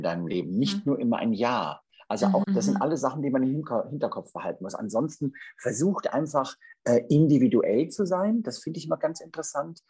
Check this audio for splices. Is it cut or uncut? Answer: cut